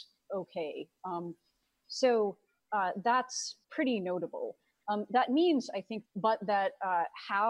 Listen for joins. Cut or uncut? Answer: cut